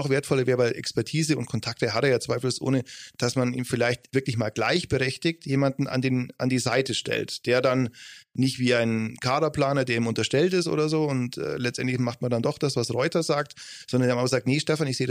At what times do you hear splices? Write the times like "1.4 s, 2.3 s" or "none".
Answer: none